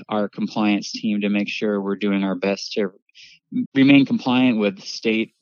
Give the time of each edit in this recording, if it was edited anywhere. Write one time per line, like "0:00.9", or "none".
0:03.7